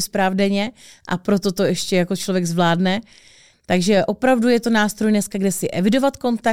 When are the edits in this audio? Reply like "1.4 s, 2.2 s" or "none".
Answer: 3.5 s

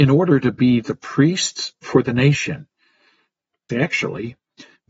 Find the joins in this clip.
3.7 s

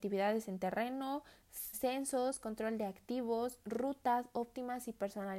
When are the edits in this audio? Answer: 1.7 s

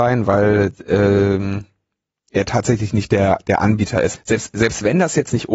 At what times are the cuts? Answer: 4.2 s

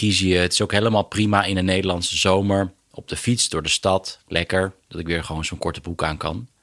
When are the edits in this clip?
4.9 s

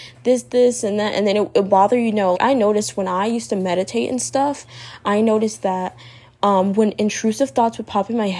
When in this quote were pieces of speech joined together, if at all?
2.3 s

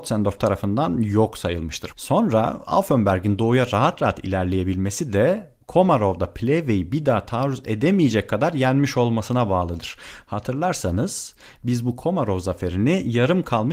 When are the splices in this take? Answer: 1.9 s

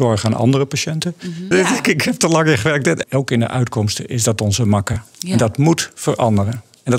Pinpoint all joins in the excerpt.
1.5 s, 3.0 s

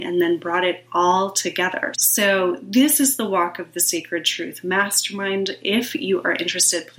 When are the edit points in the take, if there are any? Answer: 1.9 s

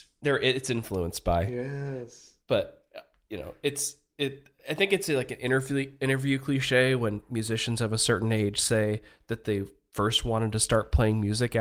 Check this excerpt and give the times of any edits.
2.4 s

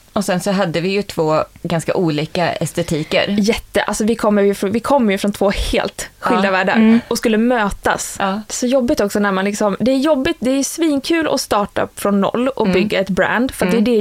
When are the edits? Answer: 8.5 s

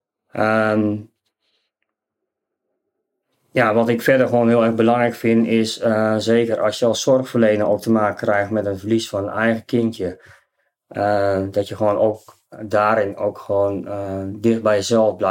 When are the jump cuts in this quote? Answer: none

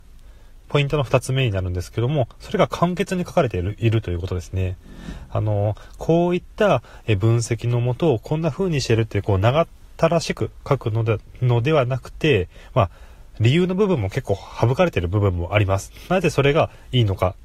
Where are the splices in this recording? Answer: none

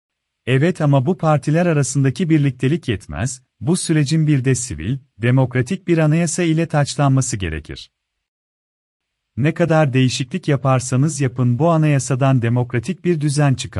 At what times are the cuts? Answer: none

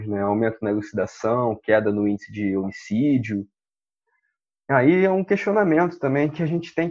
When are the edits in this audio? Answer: none

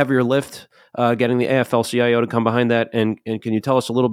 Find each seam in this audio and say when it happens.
none

